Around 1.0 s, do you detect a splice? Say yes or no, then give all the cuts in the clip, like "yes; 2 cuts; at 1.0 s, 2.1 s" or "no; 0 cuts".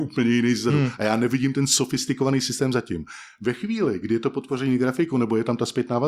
no; 0 cuts